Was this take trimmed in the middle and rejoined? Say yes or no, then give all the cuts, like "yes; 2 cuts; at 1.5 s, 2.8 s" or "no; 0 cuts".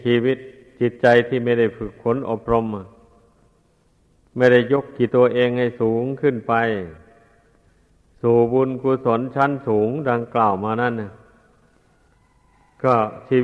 yes; 1 cut; at 5.1 s